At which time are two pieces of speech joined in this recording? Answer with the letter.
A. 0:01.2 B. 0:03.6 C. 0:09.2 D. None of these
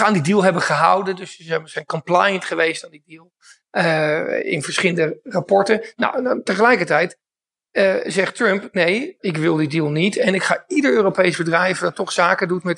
C